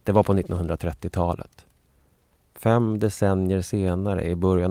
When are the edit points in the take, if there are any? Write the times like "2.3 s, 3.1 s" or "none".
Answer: none